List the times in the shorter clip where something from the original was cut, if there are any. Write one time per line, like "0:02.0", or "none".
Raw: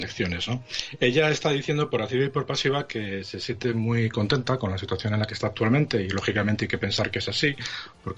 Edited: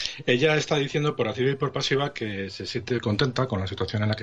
0:03.0